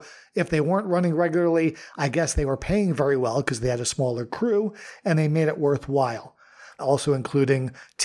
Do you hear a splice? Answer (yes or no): yes